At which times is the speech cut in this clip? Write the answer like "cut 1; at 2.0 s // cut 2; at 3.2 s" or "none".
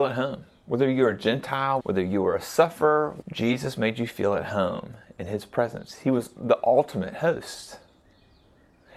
cut 1; at 1.8 s // cut 2; at 3.2 s